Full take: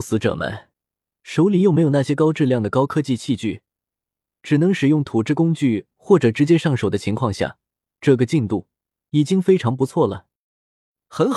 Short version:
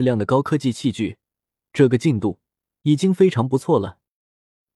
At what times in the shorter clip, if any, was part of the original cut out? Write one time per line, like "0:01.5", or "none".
0:01.6